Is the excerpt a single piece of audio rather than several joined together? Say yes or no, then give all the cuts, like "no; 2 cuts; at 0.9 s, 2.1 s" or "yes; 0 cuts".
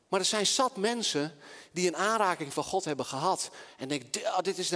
yes; 0 cuts